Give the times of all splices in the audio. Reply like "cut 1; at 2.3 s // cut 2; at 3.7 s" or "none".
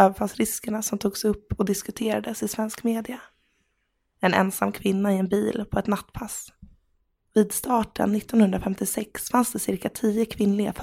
none